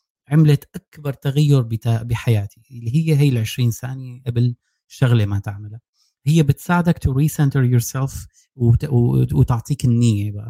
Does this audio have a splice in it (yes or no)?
no